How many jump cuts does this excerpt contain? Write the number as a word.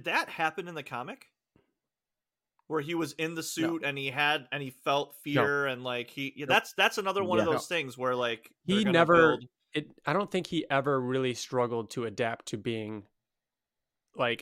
zero